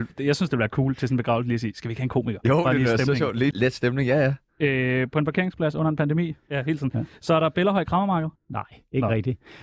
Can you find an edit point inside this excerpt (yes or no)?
yes